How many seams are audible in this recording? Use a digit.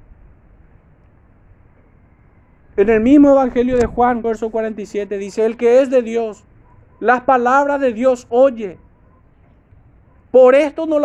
1